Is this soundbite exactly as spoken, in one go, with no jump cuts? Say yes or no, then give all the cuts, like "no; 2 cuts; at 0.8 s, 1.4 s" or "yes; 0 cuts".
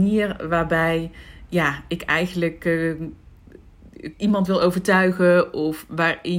no; 1 cut; at 4.1 s